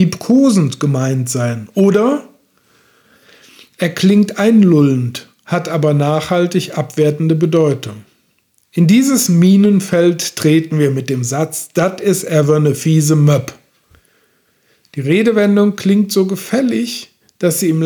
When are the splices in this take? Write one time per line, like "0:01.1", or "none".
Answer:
none